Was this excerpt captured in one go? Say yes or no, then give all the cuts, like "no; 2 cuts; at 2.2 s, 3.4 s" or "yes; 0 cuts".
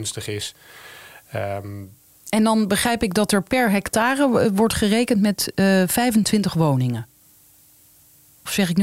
yes; 0 cuts